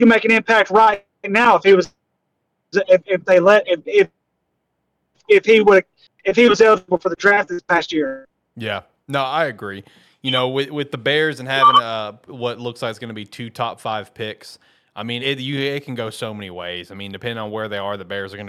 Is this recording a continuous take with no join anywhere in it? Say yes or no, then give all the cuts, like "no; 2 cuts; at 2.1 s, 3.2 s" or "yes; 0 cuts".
no; 1 cut; at 15.2 s